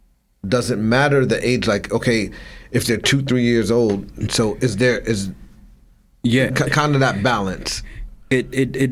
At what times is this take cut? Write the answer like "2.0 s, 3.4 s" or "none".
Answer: 4.3 s, 6.5 s